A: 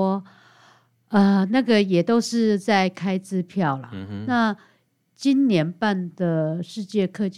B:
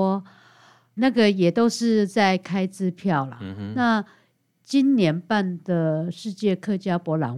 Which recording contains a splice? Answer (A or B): B